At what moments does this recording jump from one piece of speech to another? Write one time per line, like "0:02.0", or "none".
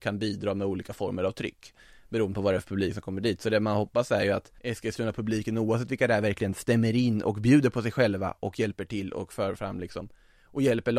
0:04.6